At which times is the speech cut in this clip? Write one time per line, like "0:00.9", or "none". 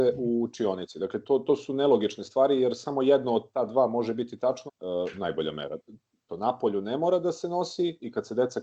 0:04.7
0:06.3